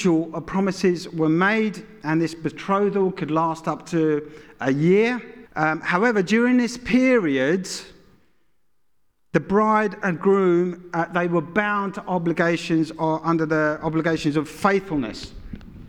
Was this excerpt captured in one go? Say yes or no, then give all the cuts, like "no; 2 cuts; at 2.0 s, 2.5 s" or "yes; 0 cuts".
no; 1 cut; at 5.5 s